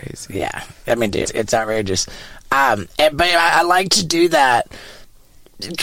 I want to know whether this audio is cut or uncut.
cut